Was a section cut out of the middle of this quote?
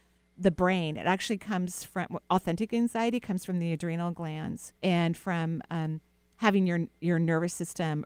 yes; 1 cut; at 4.8 s

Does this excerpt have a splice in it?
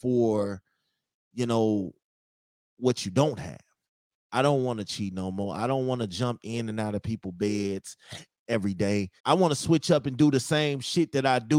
yes; 2 cuts; at 4.2 s, 9.2 s

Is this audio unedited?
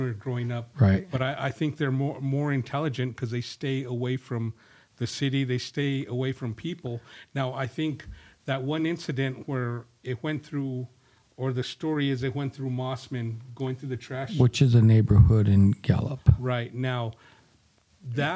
yes; 0 cuts

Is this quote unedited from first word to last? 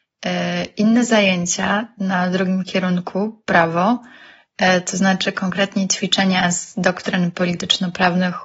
yes; 0 cuts

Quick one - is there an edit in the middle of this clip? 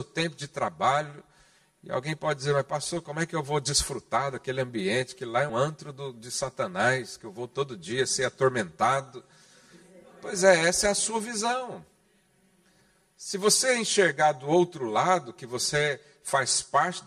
yes; 1 cut; at 5.5 s

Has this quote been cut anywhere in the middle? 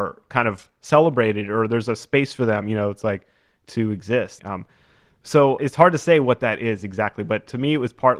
yes; 2 cuts; at 4.4 s, 5.6 s

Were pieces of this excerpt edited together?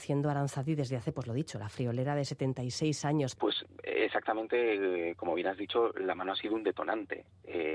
yes; 1 cut; at 3.4 s

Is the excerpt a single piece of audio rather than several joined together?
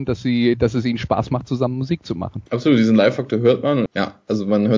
no; 2 cuts; at 2.5 s, 3.9 s

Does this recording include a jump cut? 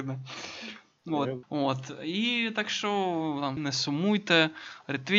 yes; 2 cuts; at 1.4 s, 3.6 s

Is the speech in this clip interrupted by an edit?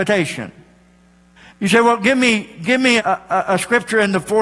yes; 2 cuts; at 1.5 s, 3.0 s

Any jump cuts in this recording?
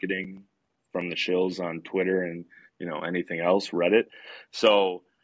no; 0 cuts

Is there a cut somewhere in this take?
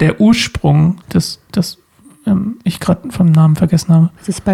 yes; 1 cut; at 1.0 s

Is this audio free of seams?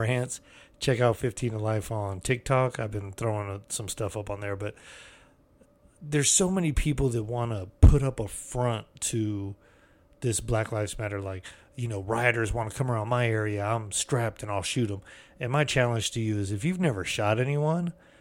yes; 0 cuts

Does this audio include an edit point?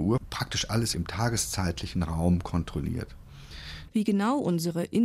yes; 1 cut; at 3.9 s

